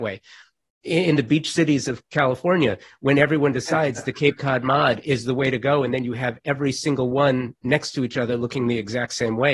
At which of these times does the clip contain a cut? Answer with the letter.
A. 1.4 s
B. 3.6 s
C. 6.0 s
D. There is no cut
D